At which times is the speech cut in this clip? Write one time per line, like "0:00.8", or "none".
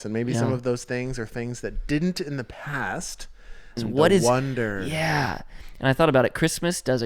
0:03.8

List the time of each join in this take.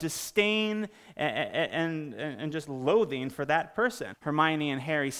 0:04.1

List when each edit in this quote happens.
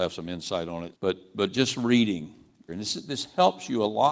0:00.9
0:02.7

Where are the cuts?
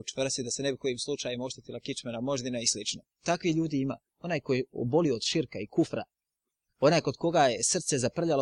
0:03.1

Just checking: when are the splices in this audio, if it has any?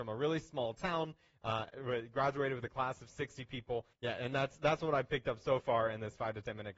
0:03.9

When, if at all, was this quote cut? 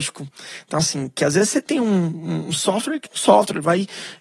0:03.1

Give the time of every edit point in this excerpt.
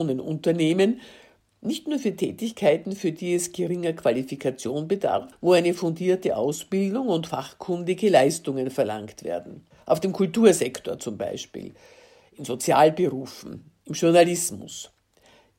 0:05.3

